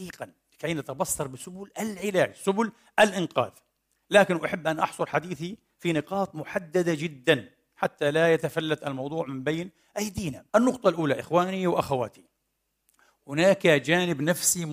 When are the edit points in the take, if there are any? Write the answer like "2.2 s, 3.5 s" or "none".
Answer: 10.5 s